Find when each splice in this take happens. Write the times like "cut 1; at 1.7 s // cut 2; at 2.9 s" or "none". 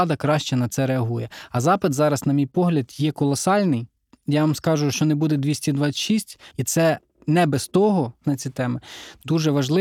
cut 1; at 4.9 s // cut 2; at 6.5 s // cut 3; at 8.2 s

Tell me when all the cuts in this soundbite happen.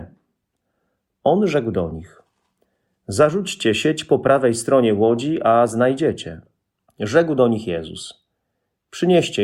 cut 1; at 6.9 s

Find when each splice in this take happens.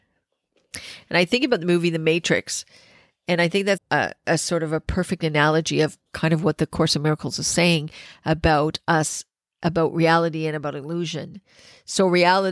cut 1; at 3.8 s // cut 2; at 6.1 s

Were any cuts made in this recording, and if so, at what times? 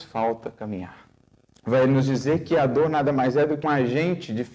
cut 1; at 1.5 s // cut 2; at 3.6 s

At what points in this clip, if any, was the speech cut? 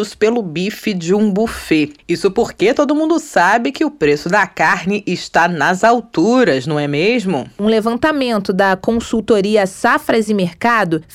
cut 1; at 2.0 s

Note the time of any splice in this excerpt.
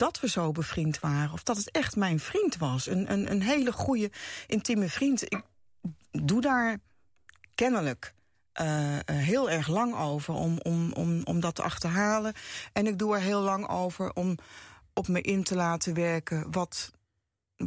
none

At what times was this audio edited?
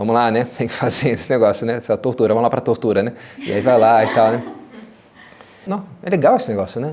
cut 1; at 5.7 s

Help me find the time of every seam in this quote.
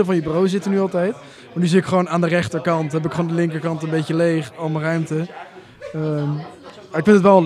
none

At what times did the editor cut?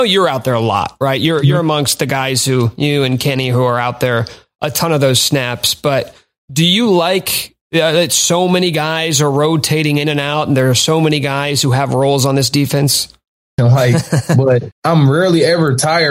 cut 1; at 13.6 s // cut 2; at 14.7 s

